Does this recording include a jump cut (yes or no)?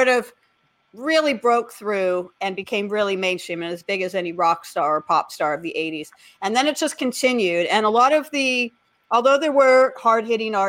no